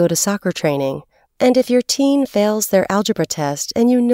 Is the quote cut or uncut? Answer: cut